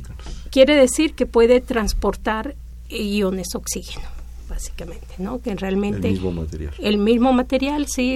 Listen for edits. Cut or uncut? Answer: uncut